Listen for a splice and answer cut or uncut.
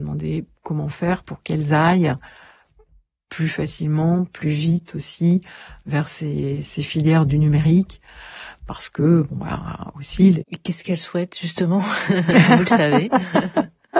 cut